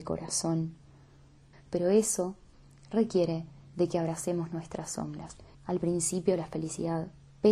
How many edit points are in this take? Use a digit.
2